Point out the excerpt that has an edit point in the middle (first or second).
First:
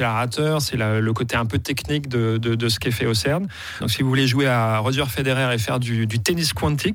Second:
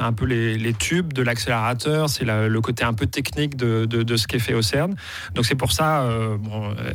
first